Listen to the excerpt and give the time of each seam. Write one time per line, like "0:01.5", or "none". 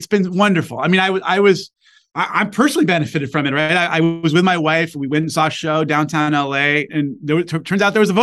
none